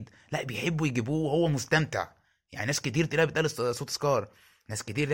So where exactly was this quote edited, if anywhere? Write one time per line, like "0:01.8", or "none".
none

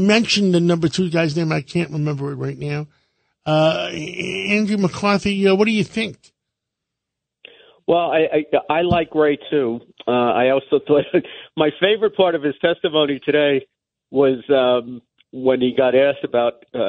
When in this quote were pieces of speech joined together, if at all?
none

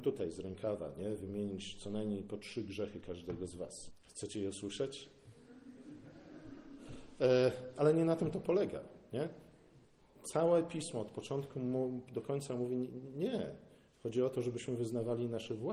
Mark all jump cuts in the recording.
0:03.9

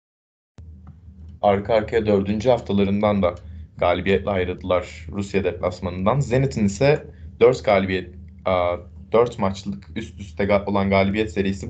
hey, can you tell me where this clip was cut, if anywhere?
0:01.4

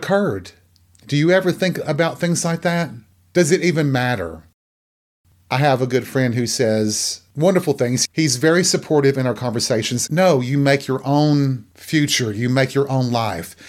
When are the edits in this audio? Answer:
0:10.1

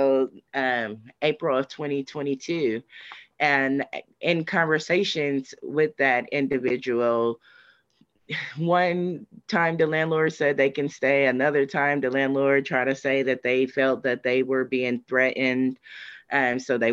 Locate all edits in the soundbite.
none

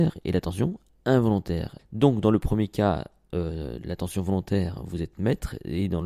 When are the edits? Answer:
0:01.8

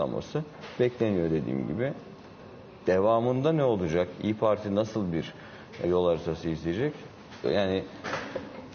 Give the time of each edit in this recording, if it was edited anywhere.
0:05.8
0:07.4

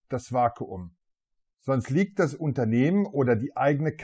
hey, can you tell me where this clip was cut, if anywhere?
0:01.5

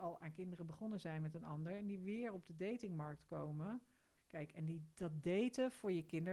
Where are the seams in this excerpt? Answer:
0:04.2

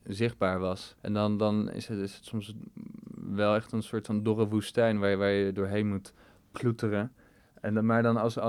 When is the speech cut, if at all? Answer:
0:01.0

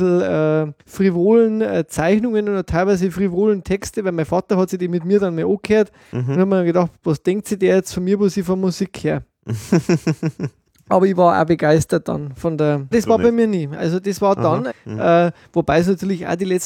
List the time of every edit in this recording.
0:12.9
0:14.7

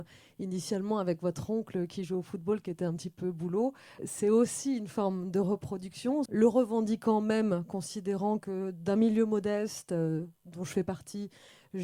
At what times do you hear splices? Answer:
0:04.0
0:06.3

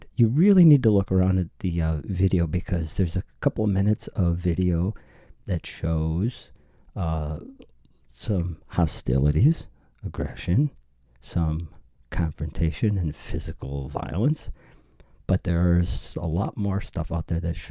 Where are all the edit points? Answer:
none

